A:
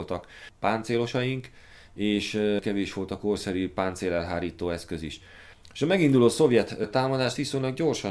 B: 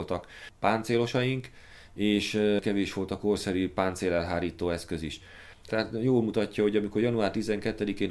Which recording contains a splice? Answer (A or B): B